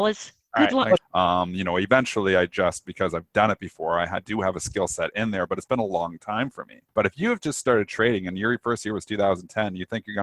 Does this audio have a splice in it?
yes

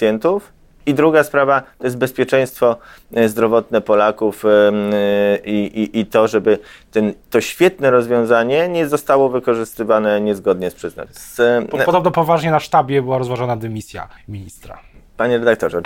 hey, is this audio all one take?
no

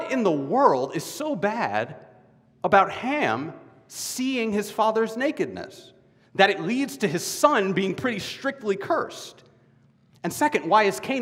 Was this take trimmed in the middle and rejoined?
no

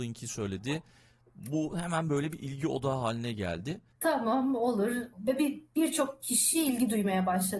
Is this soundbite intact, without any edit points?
no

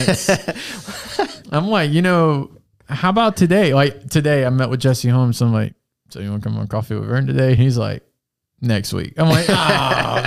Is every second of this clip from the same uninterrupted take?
yes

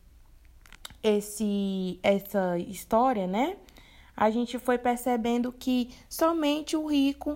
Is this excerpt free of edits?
yes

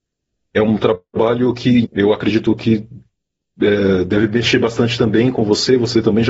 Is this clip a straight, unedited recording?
no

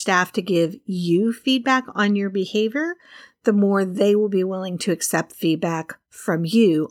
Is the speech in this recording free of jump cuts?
yes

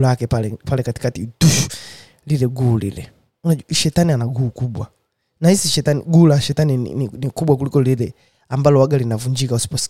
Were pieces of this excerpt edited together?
no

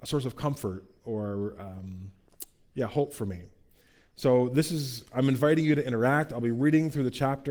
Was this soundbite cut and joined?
no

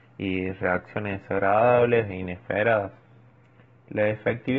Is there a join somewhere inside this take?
no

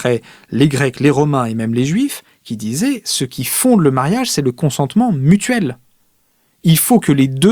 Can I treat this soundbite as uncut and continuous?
yes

